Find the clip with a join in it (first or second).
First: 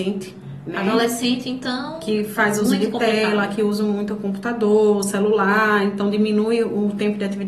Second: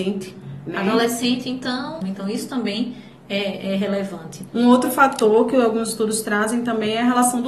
second